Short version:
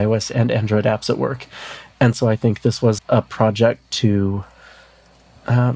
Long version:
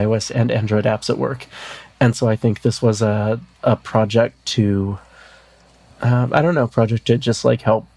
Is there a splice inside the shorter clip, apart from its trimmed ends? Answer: yes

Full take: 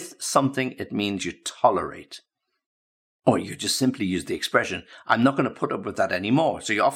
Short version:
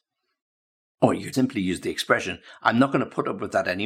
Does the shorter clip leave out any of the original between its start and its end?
yes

